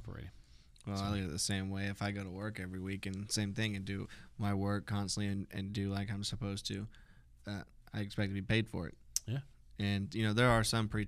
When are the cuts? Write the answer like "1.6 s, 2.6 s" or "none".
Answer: none